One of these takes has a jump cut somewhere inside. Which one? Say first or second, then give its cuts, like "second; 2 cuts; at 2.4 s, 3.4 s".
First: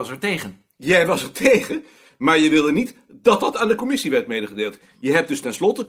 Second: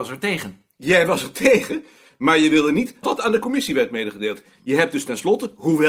second; 1 cut; at 3.0 s